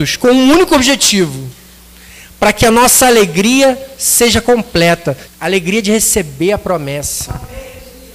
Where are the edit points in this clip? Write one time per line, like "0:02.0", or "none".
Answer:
0:05.3